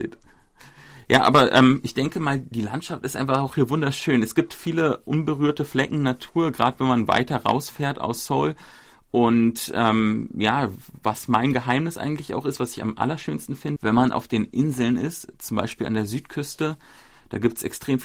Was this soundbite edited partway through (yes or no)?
yes